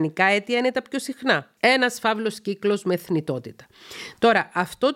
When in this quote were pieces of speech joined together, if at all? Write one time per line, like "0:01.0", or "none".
0:01.6